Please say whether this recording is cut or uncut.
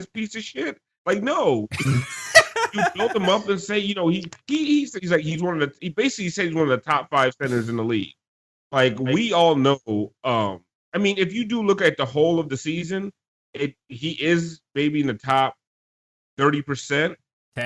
uncut